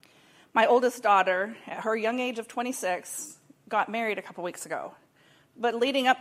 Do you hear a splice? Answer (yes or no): no